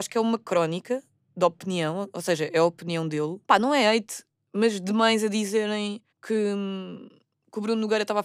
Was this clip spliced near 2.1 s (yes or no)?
no